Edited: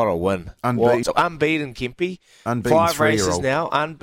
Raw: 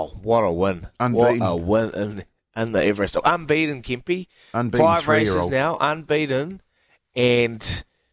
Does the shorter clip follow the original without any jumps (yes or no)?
no